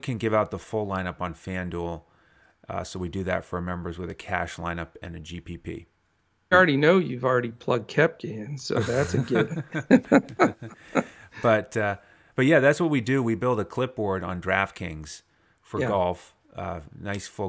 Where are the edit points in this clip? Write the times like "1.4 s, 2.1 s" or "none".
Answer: 6.5 s